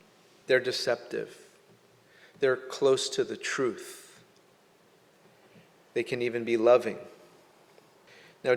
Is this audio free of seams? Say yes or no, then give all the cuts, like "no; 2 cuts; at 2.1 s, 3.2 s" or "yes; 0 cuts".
yes; 0 cuts